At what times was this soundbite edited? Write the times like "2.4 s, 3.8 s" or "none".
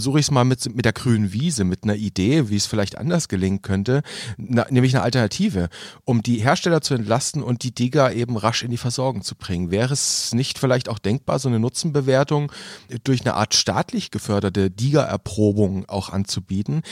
none